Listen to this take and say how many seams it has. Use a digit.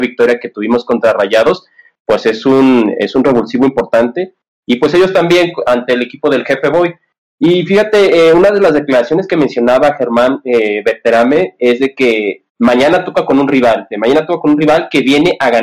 2